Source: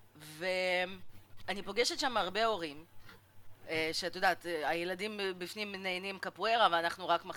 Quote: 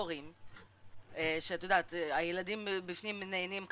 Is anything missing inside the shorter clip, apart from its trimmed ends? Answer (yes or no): no